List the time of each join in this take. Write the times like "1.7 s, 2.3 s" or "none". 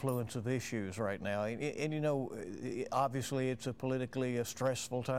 none